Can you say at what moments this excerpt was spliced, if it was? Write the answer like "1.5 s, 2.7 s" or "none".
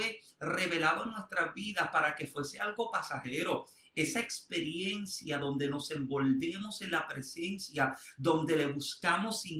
none